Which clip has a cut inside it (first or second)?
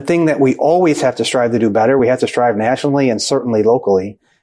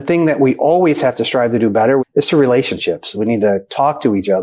second